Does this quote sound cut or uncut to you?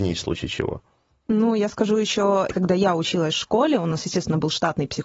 cut